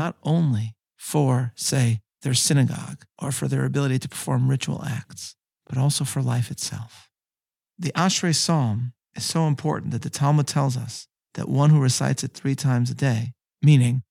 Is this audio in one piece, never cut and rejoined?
yes; 0 cuts

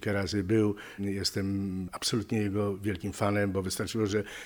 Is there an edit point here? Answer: yes; 1 cut; at 1.0 s

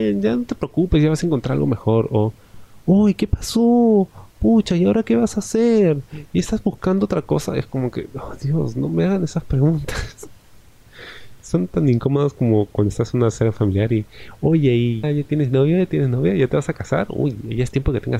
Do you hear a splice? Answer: yes; 1 cut; at 15.0 s

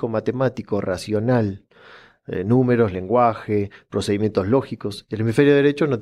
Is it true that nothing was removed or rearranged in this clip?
yes; 0 cuts

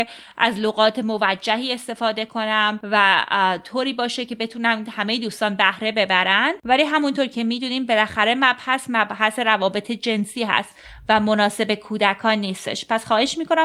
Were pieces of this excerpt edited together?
no; 0 cuts

